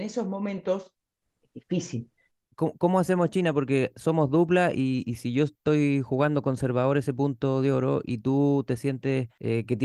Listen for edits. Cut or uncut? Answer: uncut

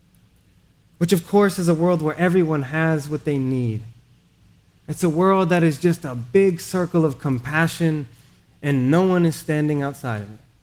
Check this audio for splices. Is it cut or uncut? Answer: uncut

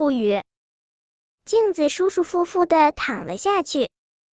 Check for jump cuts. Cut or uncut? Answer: cut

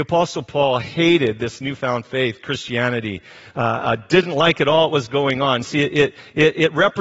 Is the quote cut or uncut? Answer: uncut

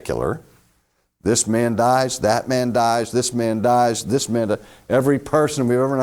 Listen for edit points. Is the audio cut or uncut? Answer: uncut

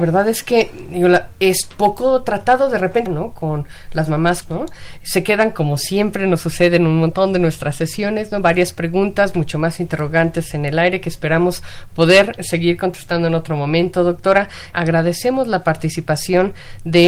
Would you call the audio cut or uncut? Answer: cut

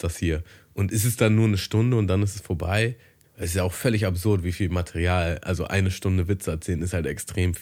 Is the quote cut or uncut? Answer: cut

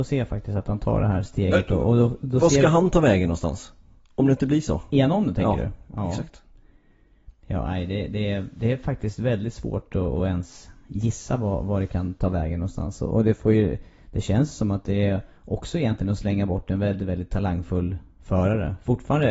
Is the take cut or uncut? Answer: uncut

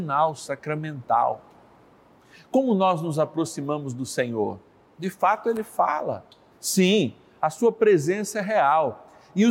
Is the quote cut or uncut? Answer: cut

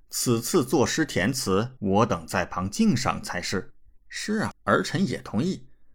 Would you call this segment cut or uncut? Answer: cut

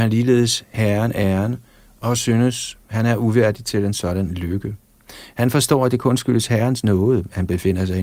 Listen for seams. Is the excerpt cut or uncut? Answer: uncut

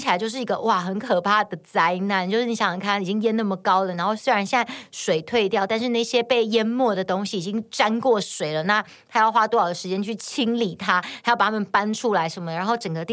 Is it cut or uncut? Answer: uncut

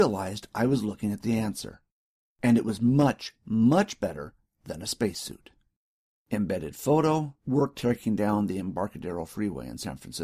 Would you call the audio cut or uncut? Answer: uncut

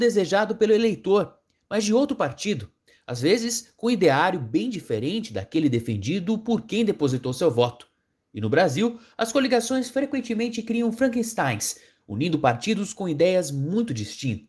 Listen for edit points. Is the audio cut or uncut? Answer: uncut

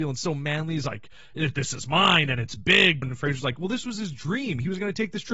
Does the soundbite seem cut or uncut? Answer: cut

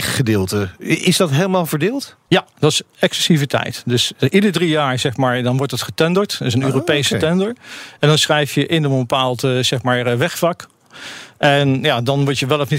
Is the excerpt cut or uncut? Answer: uncut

